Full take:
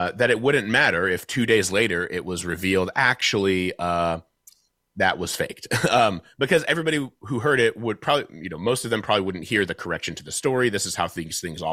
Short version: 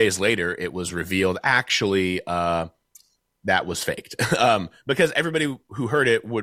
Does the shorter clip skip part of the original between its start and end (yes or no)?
no